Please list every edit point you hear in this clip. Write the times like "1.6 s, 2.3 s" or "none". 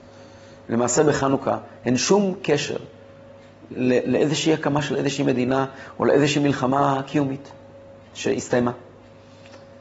3.7 s